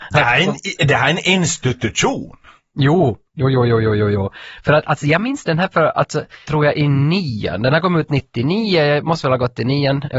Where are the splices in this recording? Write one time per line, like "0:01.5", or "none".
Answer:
0:06.4